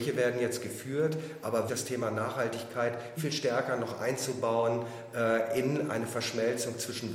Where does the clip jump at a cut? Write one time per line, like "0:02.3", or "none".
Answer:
0:01.7
0:03.2

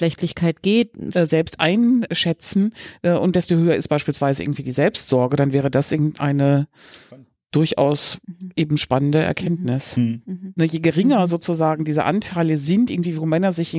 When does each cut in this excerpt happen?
0:01.1
0:10.6

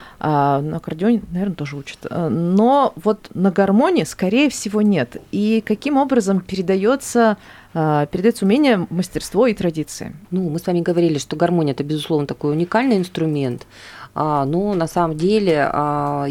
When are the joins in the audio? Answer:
0:10.2

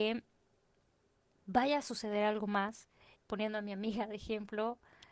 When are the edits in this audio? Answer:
0:03.1

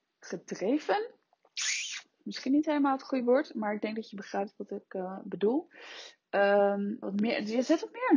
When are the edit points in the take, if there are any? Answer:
0:07.0

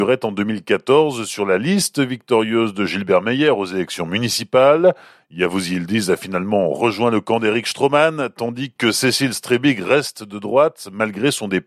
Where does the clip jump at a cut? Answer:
none

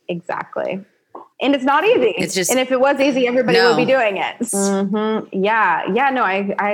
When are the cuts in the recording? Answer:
0:01.3
0:04.5

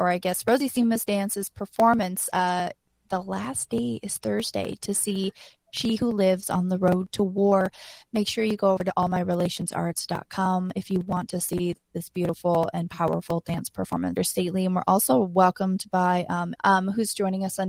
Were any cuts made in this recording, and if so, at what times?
0:14.2
0:16.5

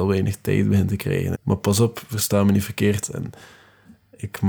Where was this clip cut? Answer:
0:01.3
0:03.0

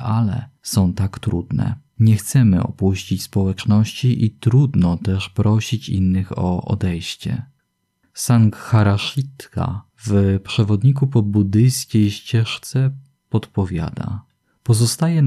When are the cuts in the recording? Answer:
none

